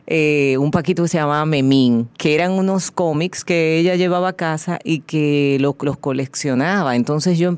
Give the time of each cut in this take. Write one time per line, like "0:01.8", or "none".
0:02.1
0:05.8